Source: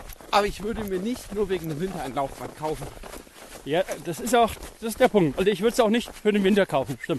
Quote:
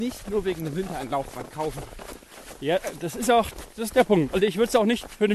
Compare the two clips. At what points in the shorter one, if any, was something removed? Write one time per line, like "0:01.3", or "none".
none